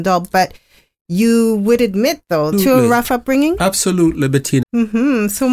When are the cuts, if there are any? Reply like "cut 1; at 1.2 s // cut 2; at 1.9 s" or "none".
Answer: cut 1; at 2.5 s // cut 2; at 4.6 s